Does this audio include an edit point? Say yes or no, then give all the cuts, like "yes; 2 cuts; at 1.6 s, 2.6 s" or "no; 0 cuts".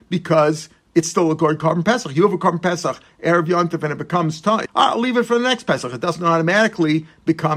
yes; 1 cut; at 4.7 s